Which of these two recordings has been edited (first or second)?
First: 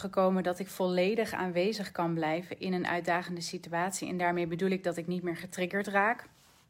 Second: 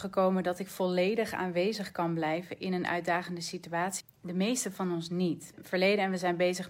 second